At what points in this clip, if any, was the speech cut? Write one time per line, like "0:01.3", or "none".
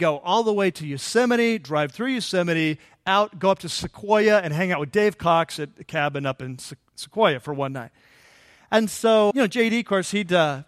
0:09.3